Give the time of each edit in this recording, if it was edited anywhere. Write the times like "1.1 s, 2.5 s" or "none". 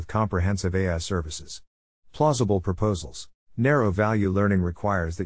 3.4 s